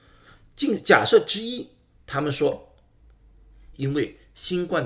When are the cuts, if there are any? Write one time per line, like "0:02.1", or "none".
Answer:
0:03.7